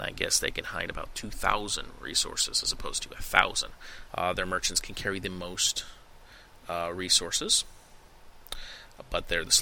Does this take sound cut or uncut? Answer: cut